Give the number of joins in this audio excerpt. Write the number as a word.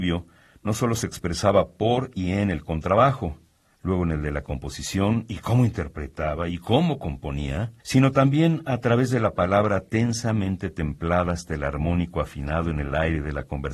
two